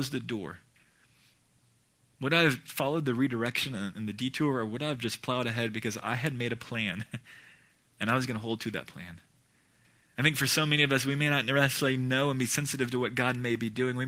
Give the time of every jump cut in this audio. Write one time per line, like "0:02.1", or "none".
none